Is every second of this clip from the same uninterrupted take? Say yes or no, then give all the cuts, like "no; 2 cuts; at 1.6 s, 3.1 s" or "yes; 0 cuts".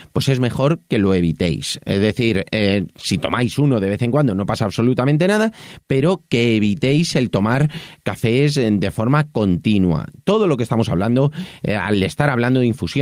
yes; 0 cuts